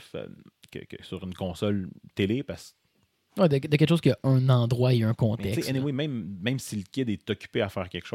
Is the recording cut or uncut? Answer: uncut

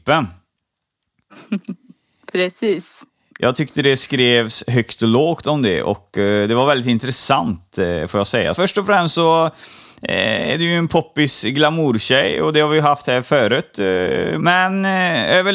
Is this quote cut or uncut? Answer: cut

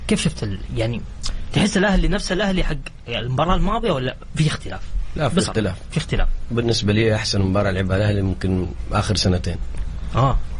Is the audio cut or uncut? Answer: uncut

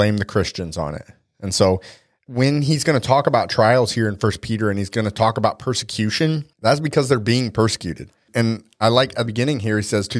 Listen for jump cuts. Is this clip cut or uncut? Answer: cut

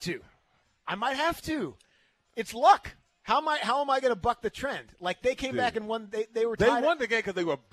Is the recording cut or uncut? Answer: uncut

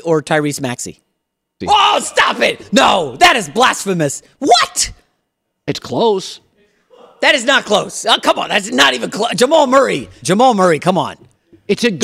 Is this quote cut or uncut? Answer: cut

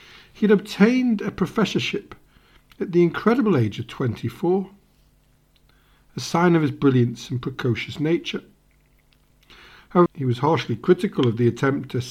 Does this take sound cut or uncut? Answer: cut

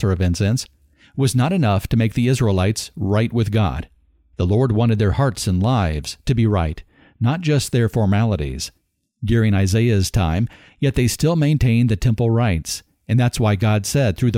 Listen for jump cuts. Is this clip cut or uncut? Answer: cut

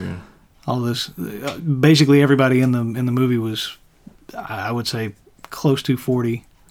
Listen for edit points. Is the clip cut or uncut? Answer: uncut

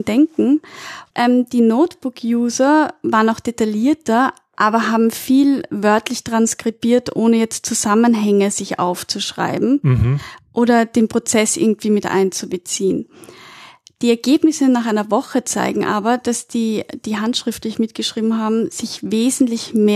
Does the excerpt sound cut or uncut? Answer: cut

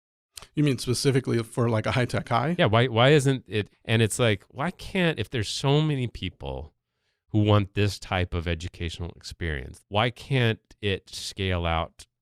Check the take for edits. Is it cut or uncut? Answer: cut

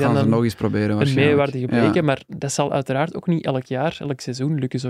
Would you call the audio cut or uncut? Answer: uncut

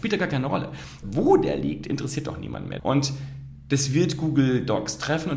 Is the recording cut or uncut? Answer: cut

